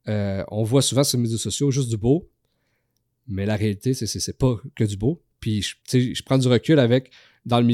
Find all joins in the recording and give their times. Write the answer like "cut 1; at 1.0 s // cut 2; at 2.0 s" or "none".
cut 1; at 5.8 s

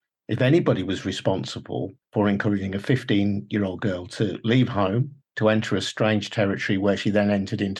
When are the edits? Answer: cut 1; at 2.0 s

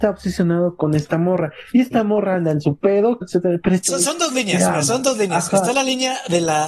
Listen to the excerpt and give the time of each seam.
cut 1; at 3.2 s

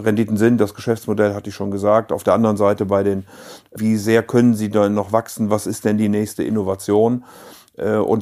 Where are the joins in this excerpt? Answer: cut 1; at 3.8 s

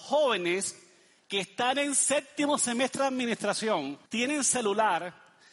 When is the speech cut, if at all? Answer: cut 1; at 4.1 s

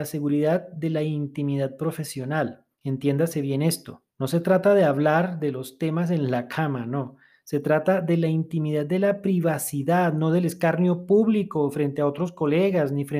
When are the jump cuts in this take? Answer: cut 1; at 2.7 s // cut 2; at 4.1 s

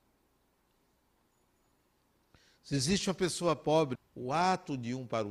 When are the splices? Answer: cut 1; at 4.0 s

